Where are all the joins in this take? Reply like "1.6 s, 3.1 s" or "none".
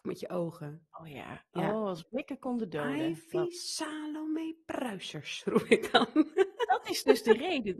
none